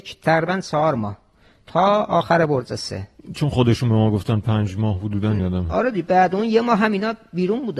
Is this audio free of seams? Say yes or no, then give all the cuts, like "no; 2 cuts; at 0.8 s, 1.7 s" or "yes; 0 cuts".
yes; 0 cuts